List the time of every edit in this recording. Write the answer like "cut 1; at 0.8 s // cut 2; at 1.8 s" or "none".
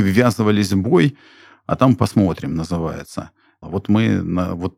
cut 1; at 3.6 s